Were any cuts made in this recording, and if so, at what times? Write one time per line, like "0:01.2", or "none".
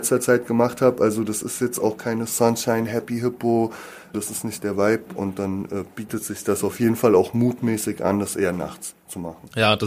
0:04.1